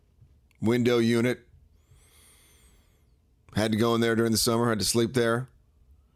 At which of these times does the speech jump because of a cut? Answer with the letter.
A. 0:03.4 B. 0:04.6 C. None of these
C